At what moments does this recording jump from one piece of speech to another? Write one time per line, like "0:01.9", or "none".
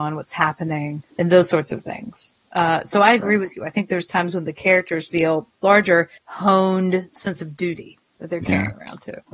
0:01.1
0:05.1
0:06.2

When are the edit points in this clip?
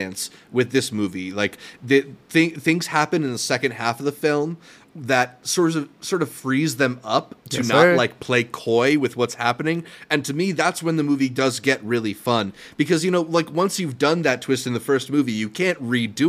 none

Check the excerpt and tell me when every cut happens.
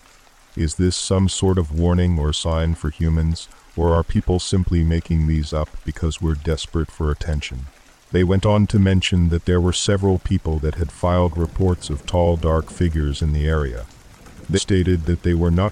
0:14.6

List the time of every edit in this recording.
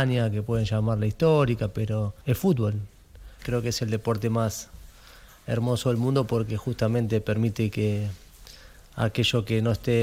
0:02.2
0:03.4

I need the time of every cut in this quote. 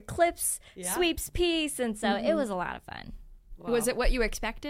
none

